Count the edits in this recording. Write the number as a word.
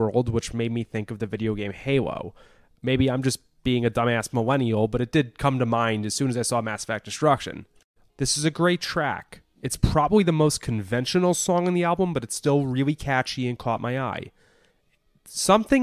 one